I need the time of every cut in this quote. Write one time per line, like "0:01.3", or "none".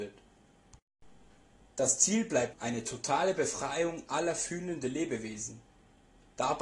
0:02.5